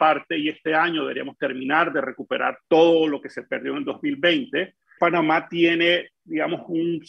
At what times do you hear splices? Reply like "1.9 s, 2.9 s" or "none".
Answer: 2.6 s, 5.0 s